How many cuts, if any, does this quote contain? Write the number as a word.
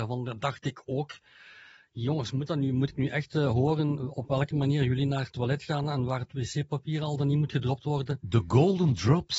zero